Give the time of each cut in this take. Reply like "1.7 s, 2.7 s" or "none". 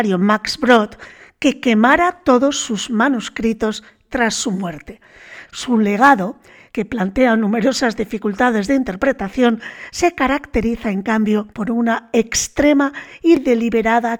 5.5 s, 11.5 s